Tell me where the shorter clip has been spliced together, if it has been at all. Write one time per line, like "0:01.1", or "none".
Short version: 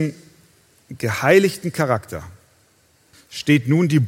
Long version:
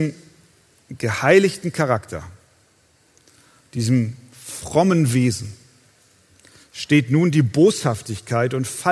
0:03.1